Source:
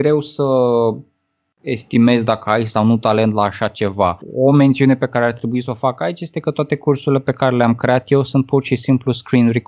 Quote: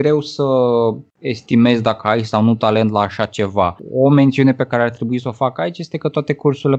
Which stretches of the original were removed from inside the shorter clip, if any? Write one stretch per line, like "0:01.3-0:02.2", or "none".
0:01.1-0:01.5